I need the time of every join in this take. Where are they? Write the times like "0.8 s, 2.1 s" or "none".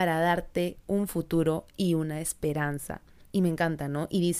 3.2 s